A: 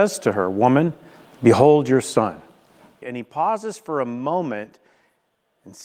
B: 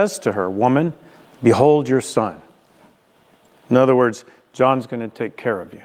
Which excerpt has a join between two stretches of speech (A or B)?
A